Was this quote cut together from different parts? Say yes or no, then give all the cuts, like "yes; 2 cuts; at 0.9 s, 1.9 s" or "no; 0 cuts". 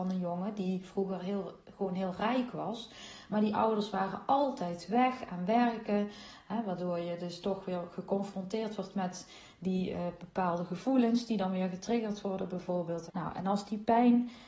yes; 2 cuts; at 6.4 s, 13.1 s